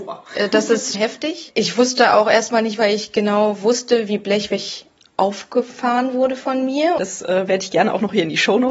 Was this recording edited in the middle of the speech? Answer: yes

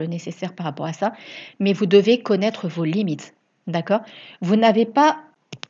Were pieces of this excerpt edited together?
no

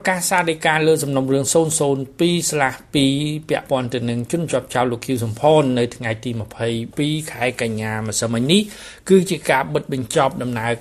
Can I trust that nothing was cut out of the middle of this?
yes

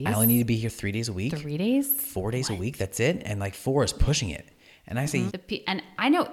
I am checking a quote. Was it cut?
yes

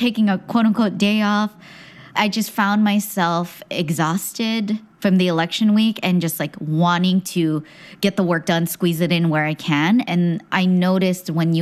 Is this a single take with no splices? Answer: yes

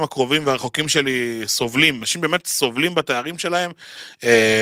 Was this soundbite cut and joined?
yes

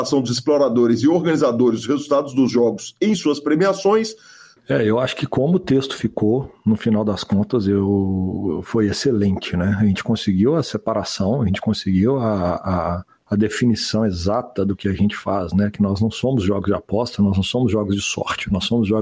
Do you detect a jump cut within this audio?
yes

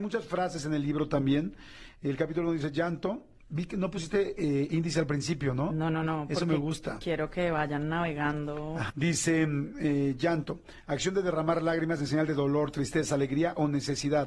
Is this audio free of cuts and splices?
no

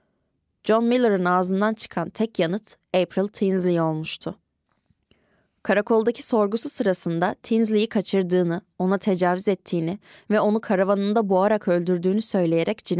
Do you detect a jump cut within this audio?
no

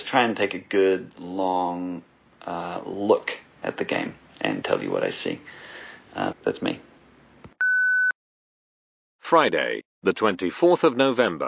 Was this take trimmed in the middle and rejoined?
yes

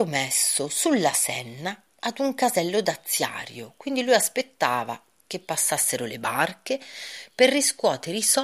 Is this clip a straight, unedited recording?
yes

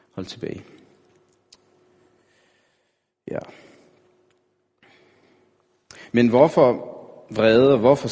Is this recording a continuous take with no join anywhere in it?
yes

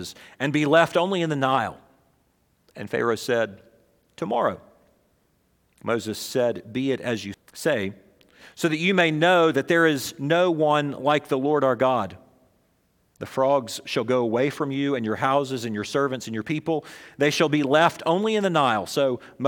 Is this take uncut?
no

